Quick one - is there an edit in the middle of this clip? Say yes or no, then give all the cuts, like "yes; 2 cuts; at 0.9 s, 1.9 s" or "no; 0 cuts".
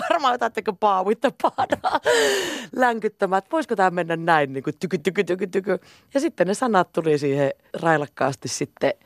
yes; 2 cuts; at 5.0 s, 7.7 s